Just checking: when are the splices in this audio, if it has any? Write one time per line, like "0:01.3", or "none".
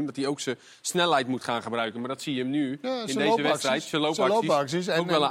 none